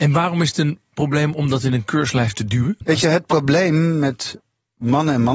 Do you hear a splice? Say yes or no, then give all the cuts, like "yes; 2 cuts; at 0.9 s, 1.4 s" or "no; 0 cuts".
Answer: no; 0 cuts